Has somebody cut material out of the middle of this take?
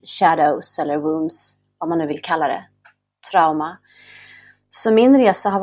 no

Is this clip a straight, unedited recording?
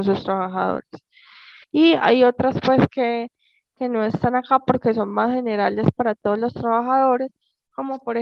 no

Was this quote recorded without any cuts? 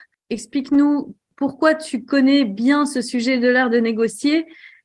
yes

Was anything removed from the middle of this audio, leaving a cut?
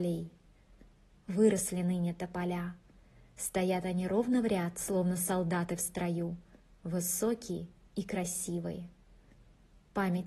no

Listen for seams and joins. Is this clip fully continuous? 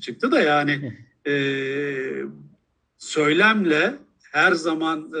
yes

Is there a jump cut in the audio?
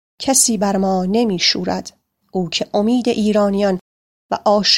yes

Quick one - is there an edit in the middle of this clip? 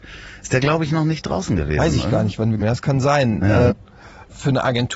yes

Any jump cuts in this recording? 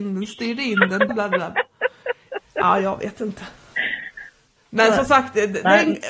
yes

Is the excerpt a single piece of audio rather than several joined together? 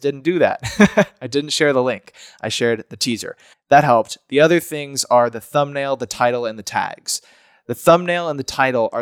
no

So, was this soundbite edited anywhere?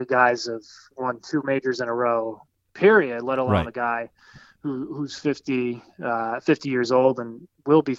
no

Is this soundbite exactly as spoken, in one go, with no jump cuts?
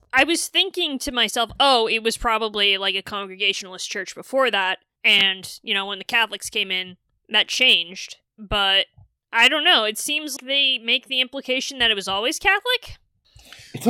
no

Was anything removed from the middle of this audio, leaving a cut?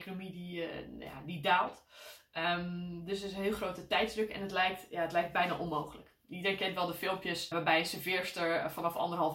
yes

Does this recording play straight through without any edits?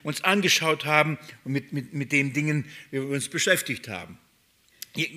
yes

